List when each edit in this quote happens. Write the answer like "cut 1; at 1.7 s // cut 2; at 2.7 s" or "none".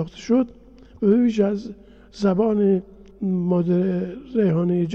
none